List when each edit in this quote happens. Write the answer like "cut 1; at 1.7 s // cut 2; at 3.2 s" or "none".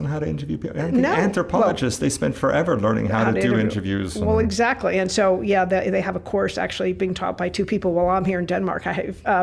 none

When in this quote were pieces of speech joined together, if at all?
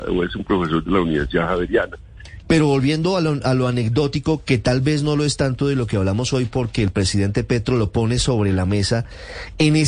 cut 1; at 2.4 s

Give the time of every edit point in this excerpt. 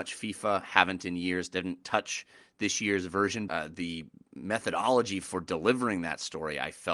cut 1; at 3.5 s

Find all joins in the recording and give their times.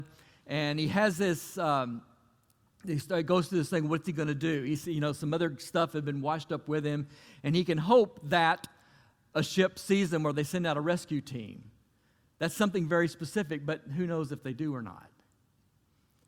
none

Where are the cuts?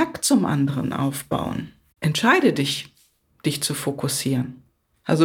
none

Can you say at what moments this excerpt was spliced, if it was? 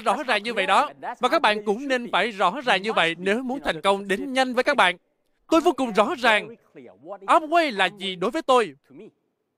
cut 1; at 5.4 s

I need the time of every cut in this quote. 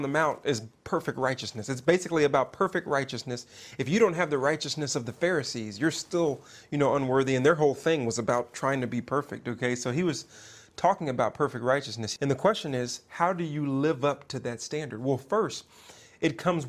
none

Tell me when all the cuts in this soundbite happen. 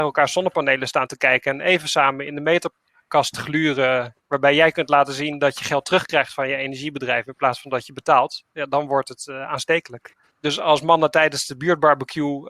cut 1; at 10.3 s

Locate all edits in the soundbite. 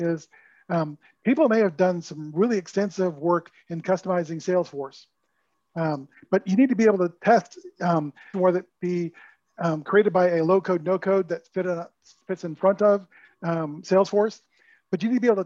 cut 1; at 8.3 s

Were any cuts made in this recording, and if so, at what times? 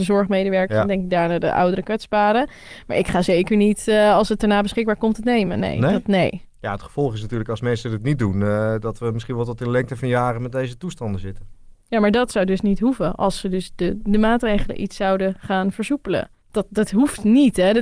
cut 1; at 16.4 s

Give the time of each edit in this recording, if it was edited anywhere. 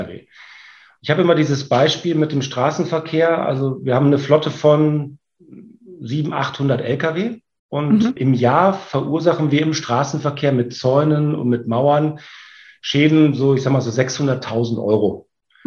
cut 1; at 1.0 s

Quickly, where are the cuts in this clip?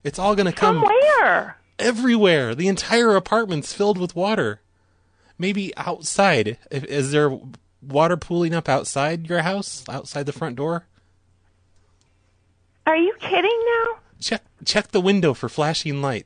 none

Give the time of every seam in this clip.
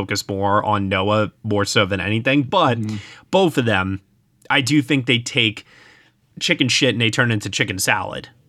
none

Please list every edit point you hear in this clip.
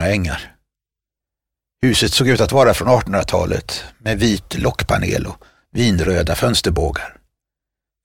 none

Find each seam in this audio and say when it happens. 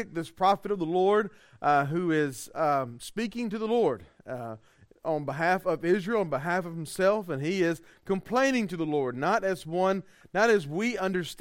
none

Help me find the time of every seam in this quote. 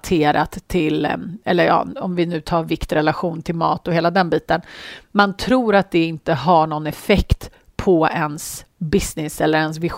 none

